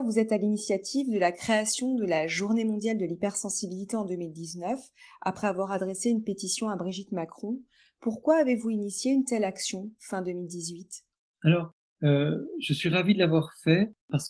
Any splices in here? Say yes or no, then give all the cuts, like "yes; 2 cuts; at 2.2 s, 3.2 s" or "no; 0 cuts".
no; 0 cuts